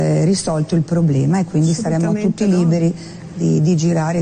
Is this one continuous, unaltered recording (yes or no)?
yes